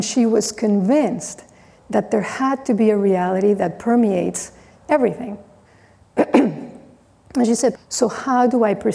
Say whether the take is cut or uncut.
cut